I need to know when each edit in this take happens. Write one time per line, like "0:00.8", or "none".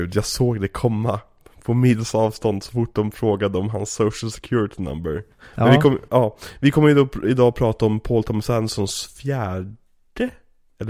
none

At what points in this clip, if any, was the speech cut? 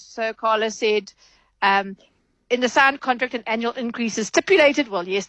none

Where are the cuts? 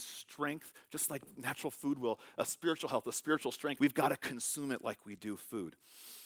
0:03.8

